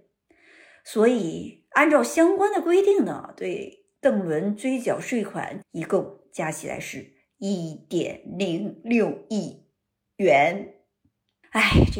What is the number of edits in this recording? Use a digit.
1